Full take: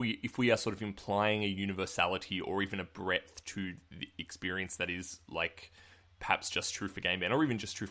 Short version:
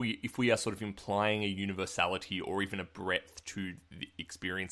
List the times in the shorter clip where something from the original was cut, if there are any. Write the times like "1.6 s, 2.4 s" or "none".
none